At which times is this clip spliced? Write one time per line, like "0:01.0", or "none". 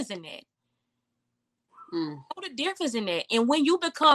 none